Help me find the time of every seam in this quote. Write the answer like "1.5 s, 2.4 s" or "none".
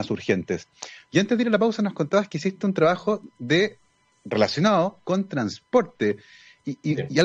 1.1 s